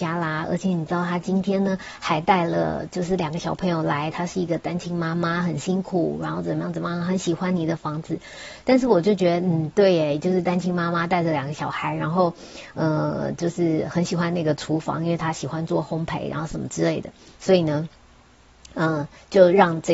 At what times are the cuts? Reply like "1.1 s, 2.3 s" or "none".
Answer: 8.6 s, 17.4 s